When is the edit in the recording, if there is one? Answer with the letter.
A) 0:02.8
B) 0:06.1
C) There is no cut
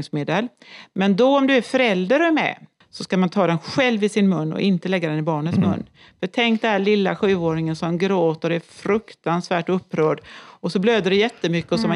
A